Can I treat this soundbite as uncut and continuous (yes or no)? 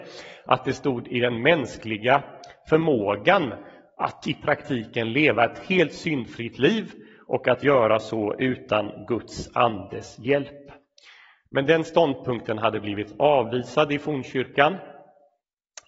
yes